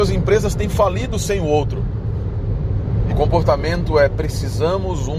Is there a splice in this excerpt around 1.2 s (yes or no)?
no